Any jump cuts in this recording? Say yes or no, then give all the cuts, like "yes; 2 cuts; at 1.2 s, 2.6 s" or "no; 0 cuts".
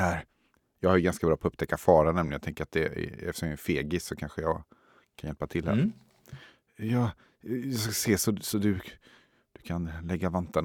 no; 0 cuts